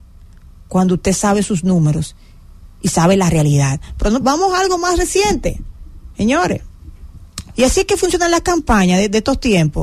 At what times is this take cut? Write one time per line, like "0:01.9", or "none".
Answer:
0:04.2
0:07.5